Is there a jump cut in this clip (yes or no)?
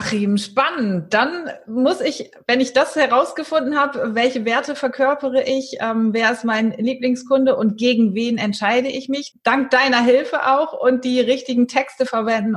yes